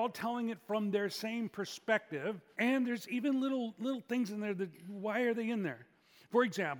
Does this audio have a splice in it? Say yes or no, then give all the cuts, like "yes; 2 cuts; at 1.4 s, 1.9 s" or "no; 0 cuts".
yes; 1 cut; at 2.5 s